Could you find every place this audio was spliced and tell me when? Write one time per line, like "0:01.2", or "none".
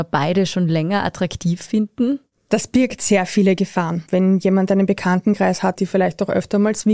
0:04.1
0:05.8